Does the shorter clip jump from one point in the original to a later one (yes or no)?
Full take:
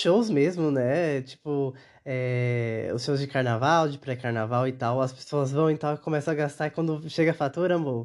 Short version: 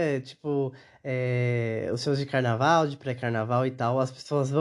no